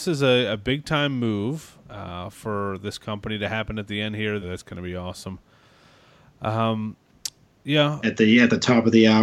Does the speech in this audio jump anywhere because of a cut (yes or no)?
yes